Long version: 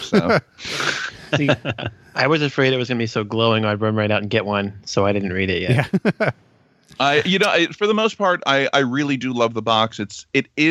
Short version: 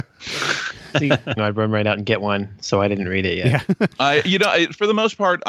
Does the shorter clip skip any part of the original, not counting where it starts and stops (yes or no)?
yes